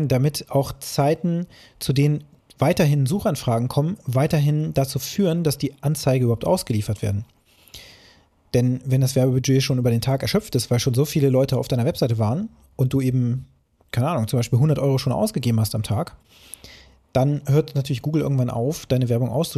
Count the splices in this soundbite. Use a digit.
0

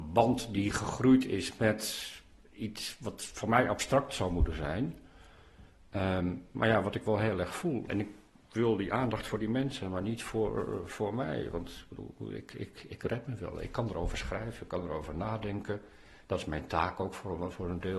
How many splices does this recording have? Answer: 0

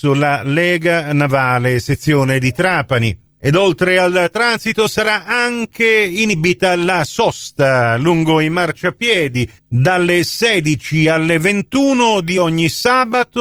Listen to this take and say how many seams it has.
1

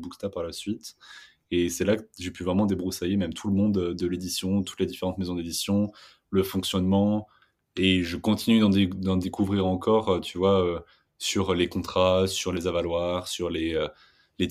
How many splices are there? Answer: 0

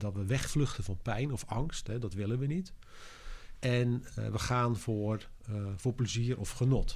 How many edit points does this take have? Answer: 0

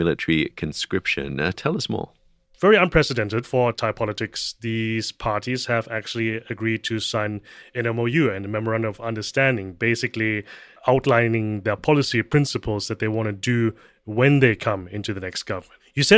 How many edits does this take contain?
0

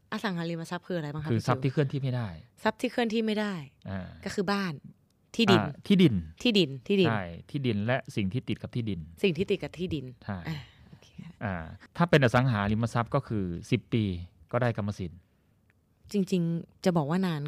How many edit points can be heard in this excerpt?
1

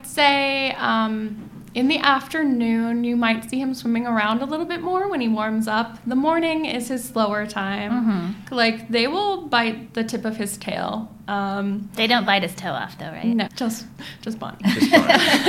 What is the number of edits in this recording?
2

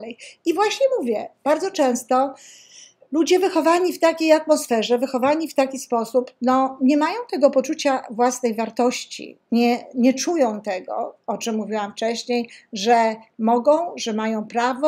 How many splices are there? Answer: 0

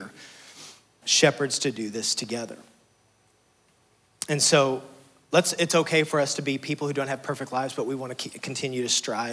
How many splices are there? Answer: 1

